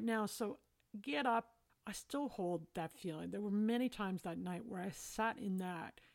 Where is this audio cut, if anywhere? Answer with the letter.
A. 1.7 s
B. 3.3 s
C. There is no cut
A